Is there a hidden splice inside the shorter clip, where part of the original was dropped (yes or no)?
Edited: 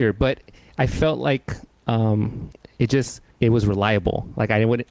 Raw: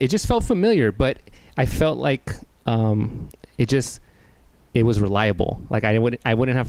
yes